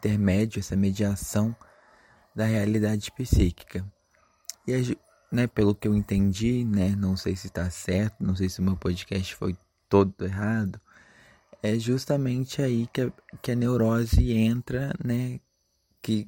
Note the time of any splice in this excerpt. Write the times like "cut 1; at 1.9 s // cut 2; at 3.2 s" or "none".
cut 1; at 4.5 s